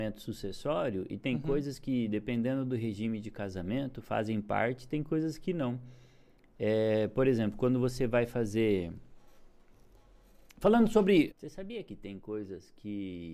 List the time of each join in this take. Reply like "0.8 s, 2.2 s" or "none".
11.3 s